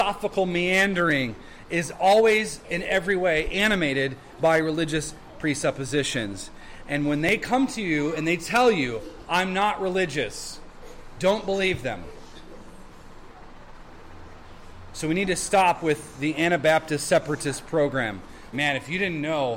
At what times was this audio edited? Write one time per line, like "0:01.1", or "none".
0:18.5